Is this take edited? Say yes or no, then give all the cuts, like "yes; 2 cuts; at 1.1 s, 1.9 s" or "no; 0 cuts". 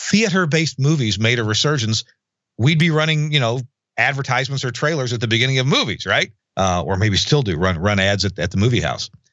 yes; 1 cut; at 6.4 s